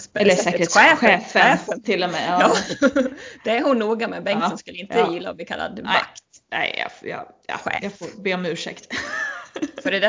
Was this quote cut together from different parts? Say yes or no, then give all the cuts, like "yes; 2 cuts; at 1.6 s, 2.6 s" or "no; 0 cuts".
no; 0 cuts